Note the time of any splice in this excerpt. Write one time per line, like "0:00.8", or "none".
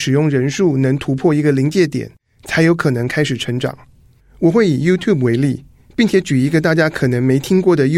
0:04.2